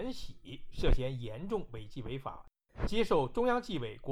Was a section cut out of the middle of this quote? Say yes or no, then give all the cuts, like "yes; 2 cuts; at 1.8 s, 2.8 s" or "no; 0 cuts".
no; 0 cuts